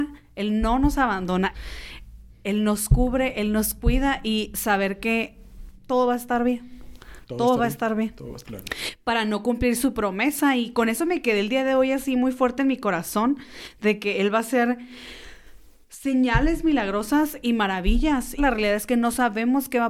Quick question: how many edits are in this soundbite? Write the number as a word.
three